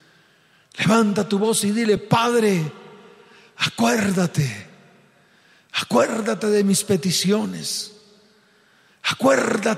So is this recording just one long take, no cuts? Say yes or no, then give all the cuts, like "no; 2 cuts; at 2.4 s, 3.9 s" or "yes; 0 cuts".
yes; 0 cuts